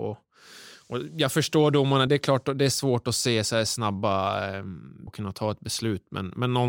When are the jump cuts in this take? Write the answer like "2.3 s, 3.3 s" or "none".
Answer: 2.1 s, 5.1 s